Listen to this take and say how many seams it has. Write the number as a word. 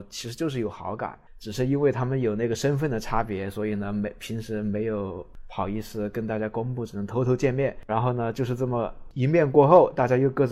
one